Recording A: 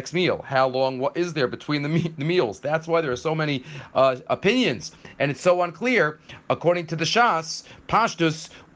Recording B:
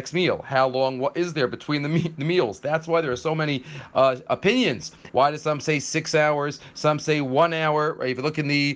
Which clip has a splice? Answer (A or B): B